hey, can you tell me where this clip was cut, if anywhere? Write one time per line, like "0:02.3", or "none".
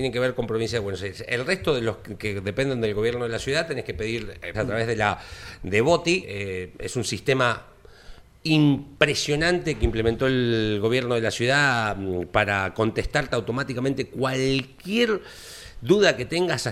0:04.5
0:06.2